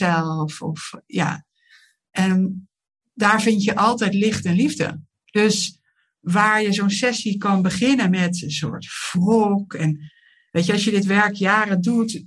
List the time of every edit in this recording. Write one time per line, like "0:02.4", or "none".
0:05.1